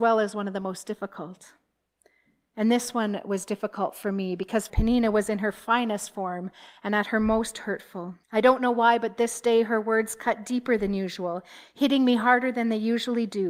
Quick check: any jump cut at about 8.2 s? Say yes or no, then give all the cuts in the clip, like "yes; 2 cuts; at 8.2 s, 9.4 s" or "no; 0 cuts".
yes; 2 cuts; at 4.7 s, 8.2 s